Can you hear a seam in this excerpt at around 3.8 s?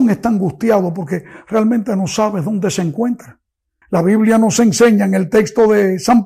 yes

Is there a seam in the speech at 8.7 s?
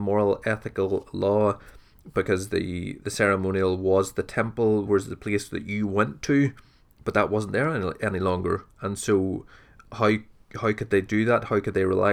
no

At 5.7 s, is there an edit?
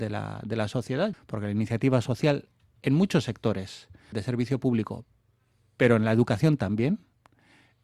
no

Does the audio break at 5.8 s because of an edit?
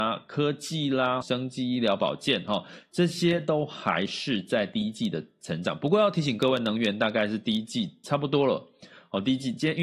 no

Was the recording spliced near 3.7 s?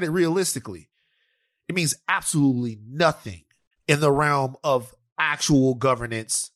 yes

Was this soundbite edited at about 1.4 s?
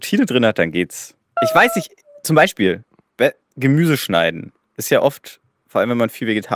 yes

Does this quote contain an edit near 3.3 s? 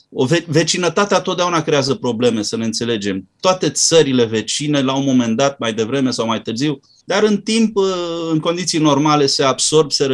no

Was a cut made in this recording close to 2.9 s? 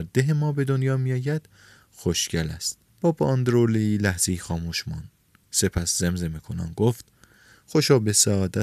yes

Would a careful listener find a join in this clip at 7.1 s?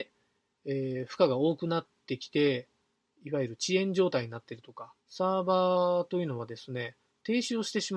no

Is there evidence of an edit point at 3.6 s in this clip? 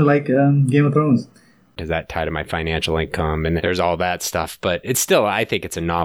yes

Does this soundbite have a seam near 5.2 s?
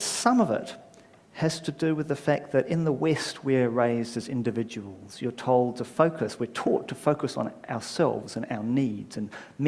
no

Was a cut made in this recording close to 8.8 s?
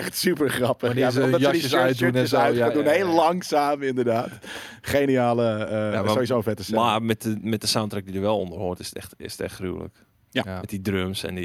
no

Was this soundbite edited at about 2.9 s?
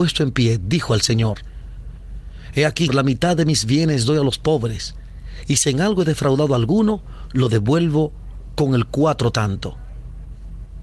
yes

